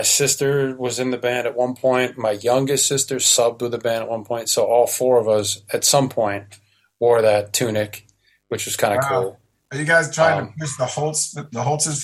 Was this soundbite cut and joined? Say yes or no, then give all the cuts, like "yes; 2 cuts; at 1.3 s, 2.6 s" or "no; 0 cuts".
no; 0 cuts